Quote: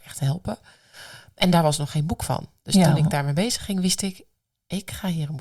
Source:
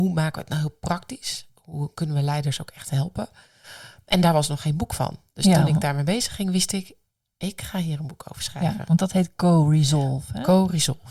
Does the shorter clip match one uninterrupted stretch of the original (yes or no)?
yes